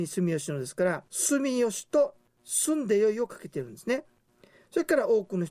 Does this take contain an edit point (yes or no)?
yes